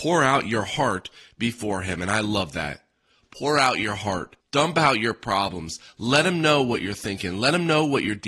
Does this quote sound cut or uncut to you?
cut